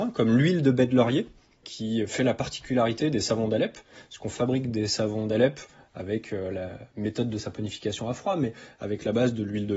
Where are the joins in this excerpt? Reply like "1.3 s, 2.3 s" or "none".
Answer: 1.6 s